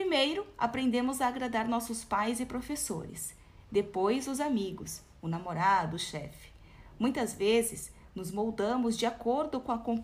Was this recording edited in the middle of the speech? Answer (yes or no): no